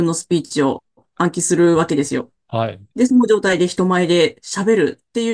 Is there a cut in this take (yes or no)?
no